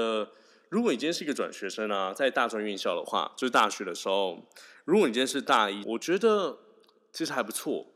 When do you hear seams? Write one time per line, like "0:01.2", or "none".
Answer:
0:05.8